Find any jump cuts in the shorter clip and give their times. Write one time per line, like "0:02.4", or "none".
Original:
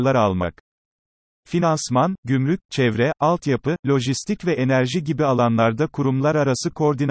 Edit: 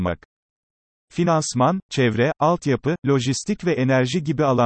0:01.8